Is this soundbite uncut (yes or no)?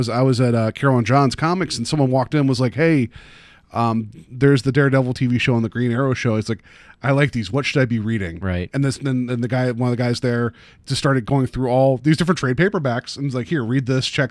yes